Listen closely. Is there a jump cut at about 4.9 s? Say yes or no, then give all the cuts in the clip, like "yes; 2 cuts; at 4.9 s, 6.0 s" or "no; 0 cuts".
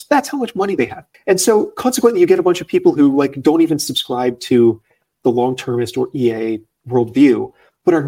no; 1 cut; at 1.1 s